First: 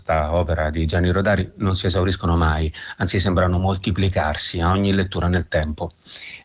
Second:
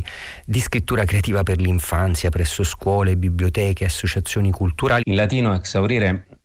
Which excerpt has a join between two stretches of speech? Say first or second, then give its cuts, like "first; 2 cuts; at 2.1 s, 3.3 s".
second; 1 cut; at 5.0 s